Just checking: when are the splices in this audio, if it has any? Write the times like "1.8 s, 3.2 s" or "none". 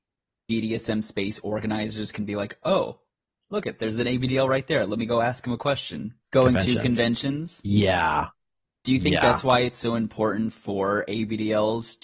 6.2 s